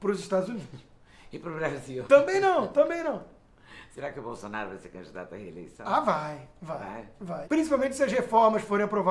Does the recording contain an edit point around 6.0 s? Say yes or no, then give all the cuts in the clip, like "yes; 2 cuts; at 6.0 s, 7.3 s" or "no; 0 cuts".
no; 1 cut; at 7.4 s